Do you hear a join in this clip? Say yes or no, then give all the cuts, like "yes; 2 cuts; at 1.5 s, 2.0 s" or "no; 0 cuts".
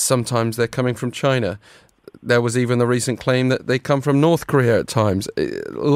no; 0 cuts